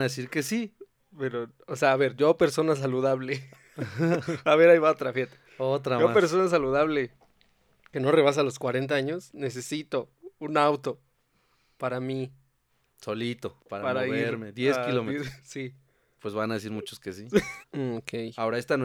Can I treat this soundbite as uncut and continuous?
no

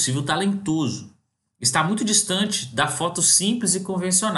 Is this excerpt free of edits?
yes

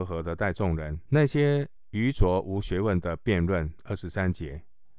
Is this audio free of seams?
no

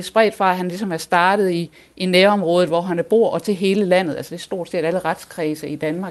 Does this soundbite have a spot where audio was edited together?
no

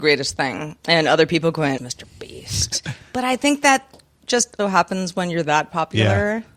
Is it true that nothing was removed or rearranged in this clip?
no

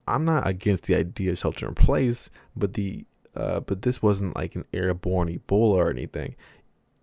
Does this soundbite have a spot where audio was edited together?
no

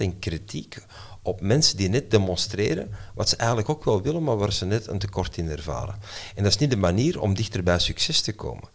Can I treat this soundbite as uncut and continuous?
yes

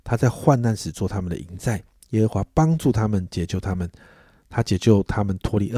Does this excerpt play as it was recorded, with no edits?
yes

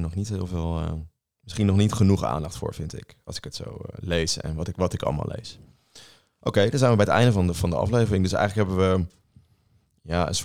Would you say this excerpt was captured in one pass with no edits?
yes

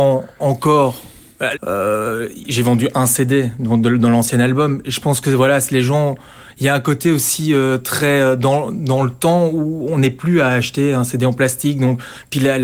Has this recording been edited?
yes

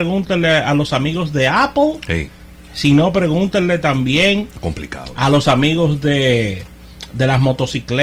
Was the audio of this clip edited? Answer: no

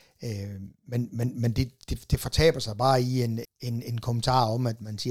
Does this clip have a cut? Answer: yes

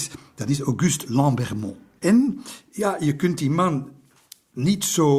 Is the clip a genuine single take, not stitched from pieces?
no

